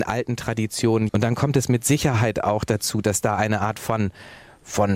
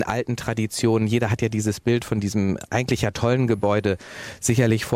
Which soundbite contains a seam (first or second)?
first